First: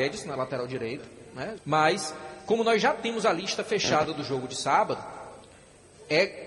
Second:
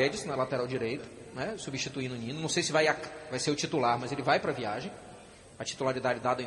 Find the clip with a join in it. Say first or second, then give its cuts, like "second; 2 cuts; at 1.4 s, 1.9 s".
first; 1 cut; at 1.6 s